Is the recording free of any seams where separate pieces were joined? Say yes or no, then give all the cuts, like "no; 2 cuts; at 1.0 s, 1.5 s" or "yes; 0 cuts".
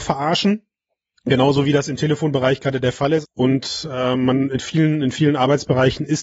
no; 1 cut; at 3.2 s